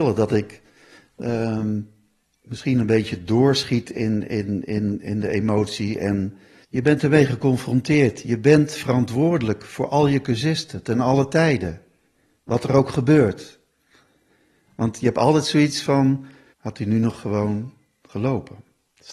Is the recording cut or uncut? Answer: cut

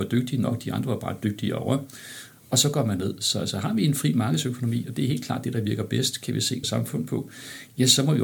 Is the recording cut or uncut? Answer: cut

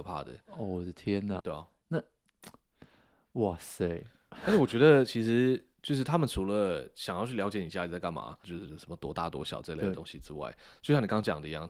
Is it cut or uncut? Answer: cut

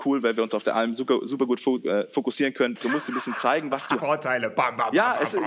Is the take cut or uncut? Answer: cut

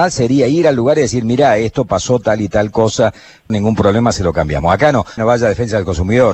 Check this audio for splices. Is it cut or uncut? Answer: cut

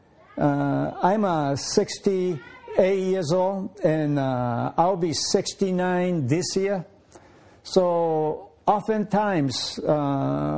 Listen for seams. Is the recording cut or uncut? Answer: uncut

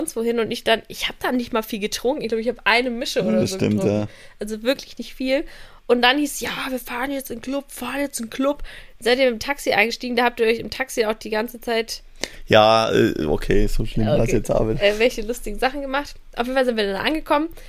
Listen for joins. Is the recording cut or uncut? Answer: uncut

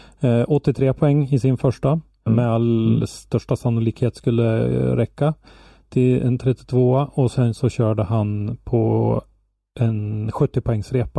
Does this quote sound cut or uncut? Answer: cut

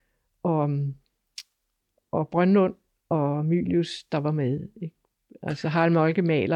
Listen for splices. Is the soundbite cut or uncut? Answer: uncut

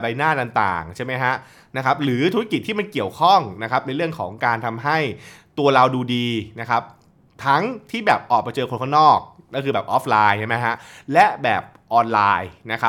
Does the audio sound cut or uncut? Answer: uncut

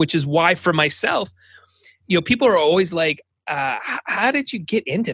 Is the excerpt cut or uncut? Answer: uncut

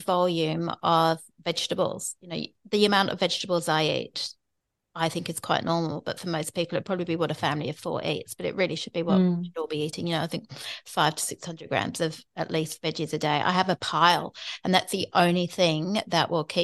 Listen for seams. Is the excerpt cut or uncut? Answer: uncut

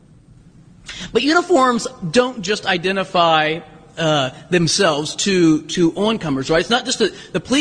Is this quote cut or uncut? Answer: uncut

